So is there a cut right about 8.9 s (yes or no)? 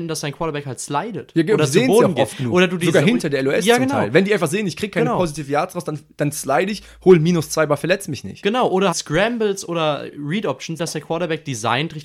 yes